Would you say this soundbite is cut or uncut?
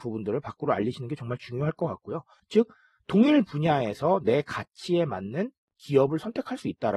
cut